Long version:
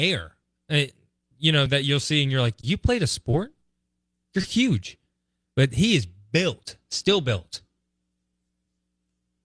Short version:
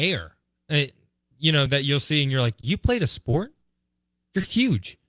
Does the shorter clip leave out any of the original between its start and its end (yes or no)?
no